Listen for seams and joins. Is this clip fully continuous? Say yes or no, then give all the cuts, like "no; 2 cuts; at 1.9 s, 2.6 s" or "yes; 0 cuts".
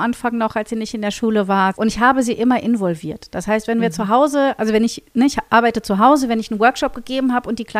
no; 1 cut; at 1.7 s